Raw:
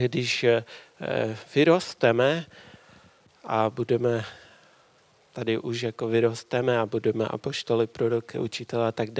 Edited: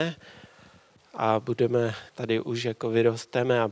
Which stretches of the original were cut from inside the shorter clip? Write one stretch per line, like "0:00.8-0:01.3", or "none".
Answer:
0:04.4-0:05.3